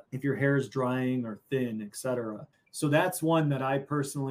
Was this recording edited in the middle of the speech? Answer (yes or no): yes